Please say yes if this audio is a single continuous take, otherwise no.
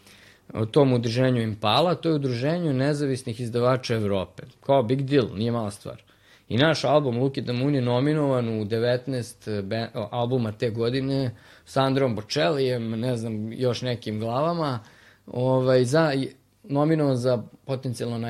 yes